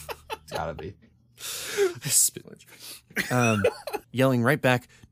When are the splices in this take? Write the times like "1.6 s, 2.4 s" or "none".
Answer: 2.4 s, 4.0 s